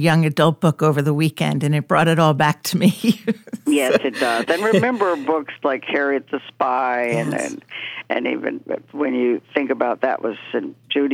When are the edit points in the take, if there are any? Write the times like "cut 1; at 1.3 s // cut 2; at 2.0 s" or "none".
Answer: none